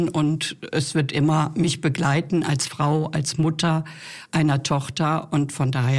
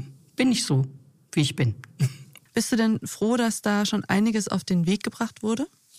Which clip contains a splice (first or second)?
second